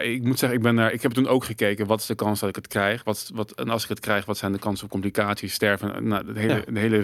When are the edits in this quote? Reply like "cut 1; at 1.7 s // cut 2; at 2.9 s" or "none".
none